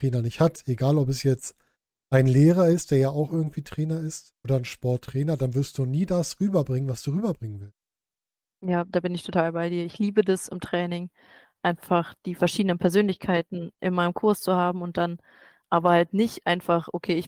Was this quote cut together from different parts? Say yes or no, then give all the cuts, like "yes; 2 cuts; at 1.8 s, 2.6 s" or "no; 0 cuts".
yes; 1 cut; at 4.4 s